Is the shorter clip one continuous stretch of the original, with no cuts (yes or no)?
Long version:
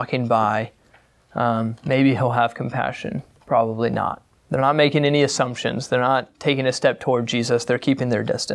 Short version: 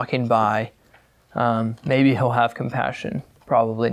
yes